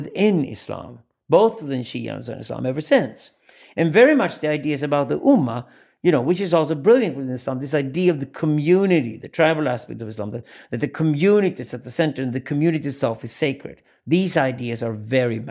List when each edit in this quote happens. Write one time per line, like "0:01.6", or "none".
none